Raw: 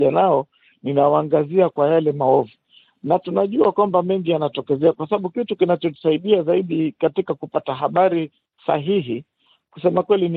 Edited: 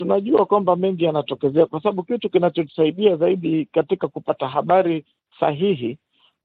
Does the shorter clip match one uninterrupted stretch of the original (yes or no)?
yes